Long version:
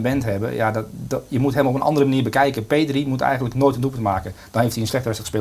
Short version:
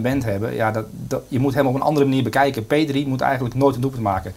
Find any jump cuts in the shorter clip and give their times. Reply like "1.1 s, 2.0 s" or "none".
none